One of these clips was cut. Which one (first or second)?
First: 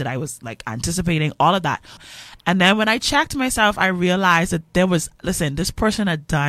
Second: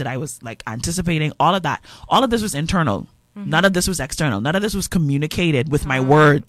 first